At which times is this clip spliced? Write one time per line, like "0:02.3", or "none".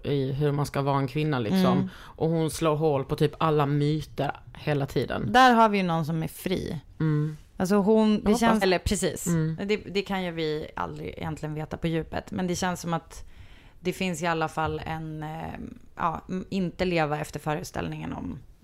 0:08.6